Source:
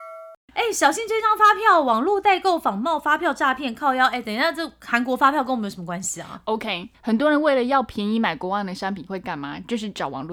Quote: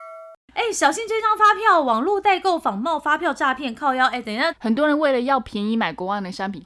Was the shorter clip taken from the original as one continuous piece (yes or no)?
no